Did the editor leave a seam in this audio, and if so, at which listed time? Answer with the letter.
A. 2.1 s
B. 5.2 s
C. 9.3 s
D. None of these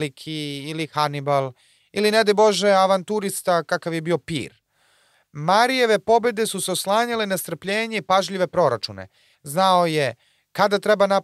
C